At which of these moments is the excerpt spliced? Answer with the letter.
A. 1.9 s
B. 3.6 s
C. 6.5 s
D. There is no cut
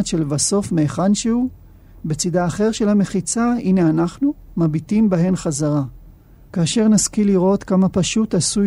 C